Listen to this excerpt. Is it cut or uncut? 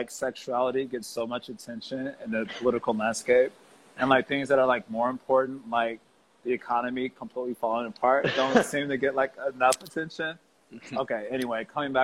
uncut